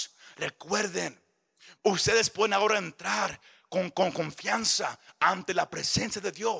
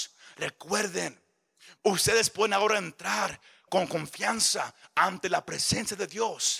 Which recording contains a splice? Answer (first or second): second